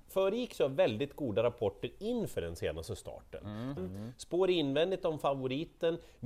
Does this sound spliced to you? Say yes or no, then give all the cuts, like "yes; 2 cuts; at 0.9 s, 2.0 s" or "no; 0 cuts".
yes; 1 cut; at 3.8 s